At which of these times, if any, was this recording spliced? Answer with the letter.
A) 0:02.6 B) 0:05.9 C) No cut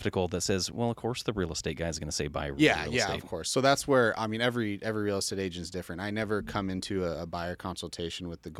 C